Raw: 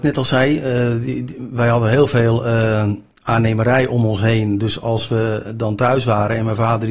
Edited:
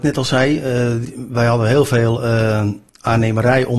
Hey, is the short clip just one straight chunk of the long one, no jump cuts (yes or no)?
no